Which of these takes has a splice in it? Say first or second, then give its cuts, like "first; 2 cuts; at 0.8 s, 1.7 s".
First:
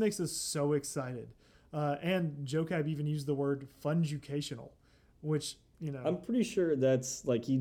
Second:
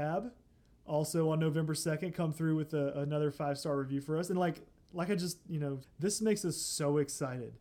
second; 1 cut; at 5.8 s